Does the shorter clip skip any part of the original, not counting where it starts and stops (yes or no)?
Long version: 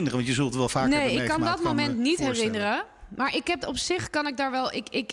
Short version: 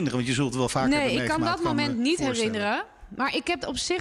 no